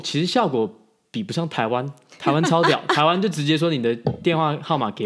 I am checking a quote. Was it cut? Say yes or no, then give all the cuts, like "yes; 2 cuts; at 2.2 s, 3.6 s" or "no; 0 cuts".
no; 0 cuts